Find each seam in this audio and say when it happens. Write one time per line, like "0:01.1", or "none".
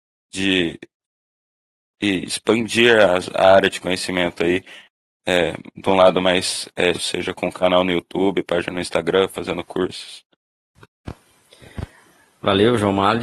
0:06.9

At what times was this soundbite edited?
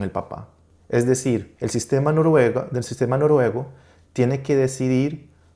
0:01.6

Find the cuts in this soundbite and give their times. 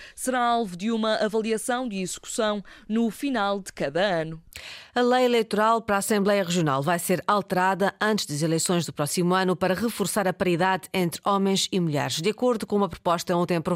none

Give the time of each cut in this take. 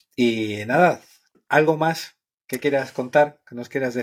0:01.3

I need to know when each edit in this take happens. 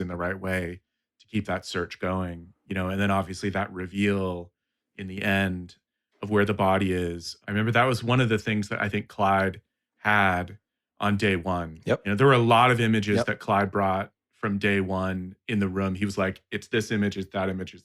none

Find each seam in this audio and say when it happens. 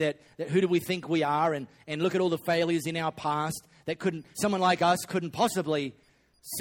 0:04.3

